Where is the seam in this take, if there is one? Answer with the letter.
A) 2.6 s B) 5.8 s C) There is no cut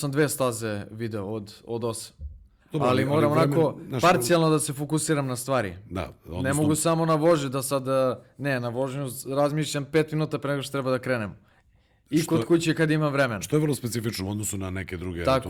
A